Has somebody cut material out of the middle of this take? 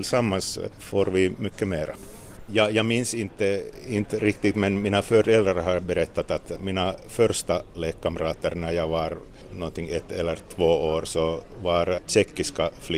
yes; 1 cut; at 2.5 s

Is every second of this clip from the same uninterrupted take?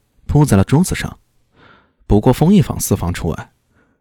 no; 1 cut; at 1.3 s

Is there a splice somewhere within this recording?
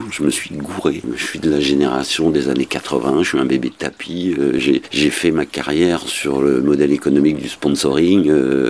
no; 0 cuts

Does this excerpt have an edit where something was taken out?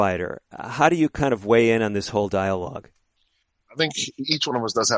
no; 0 cuts

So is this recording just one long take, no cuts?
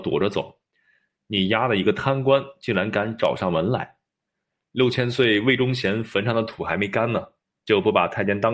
yes; 0 cuts

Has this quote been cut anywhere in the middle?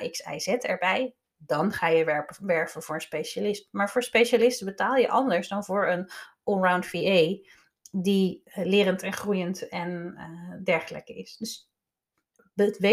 no; 0 cuts

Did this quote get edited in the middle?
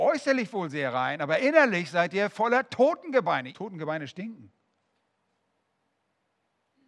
yes; 1 cut; at 3.5 s

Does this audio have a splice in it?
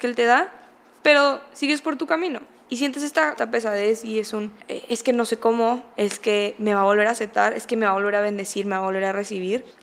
no; 0 cuts

